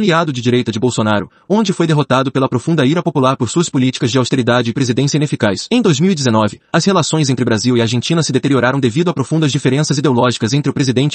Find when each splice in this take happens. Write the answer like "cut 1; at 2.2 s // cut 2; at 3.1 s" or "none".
cut 1; at 1.4 s // cut 2; at 5.7 s